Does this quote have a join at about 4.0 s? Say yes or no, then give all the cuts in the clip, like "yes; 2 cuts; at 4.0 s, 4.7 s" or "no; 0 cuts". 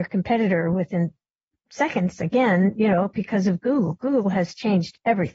no; 0 cuts